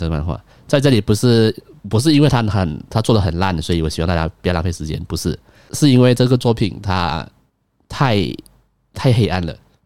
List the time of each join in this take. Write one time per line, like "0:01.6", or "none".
none